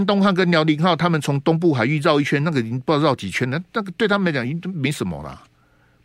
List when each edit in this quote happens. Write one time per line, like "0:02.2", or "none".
none